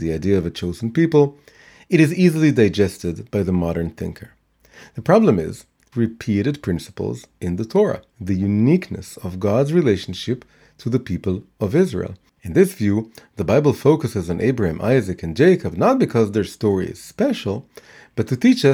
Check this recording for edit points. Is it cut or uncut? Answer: cut